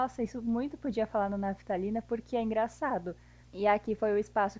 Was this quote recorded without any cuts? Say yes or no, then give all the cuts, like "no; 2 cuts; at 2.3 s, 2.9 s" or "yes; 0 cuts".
no; 1 cut; at 3.4 s